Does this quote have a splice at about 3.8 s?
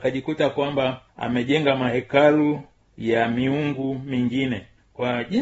no; 1 cut; at 1.1 s

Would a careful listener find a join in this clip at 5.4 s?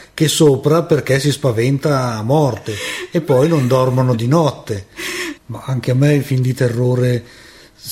yes; 1 cut; at 5.4 s

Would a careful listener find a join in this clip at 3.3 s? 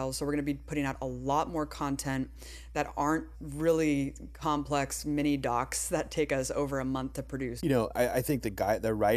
yes; 2 cuts; at 3.3 s, 7.6 s

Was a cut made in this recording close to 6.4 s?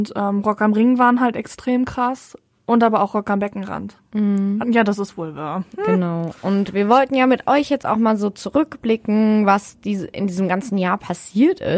no; 1 cut; at 4.6 s

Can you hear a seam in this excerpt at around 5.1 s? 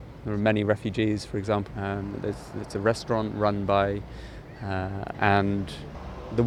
yes; 2 cuts; at 1.7 s, 5.1 s

